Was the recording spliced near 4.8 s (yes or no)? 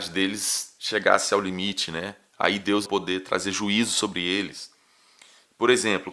no